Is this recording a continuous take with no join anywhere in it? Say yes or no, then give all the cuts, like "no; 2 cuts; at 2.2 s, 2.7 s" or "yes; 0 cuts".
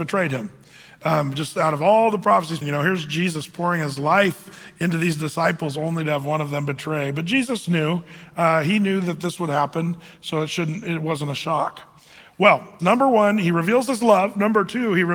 no; 2 cuts; at 2.6 s, 12.8 s